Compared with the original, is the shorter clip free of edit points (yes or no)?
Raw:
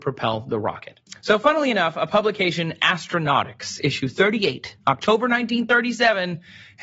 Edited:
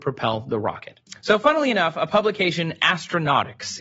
yes